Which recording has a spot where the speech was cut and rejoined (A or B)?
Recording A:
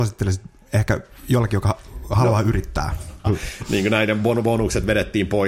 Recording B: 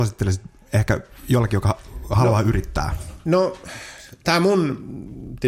A